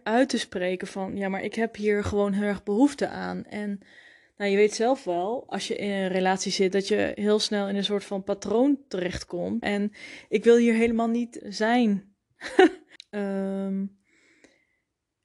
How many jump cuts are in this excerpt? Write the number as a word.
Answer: three